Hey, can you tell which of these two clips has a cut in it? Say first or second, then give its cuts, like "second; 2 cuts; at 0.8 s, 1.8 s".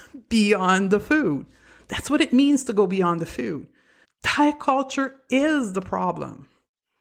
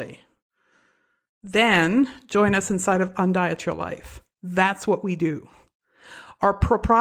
first; 1 cut; at 4.0 s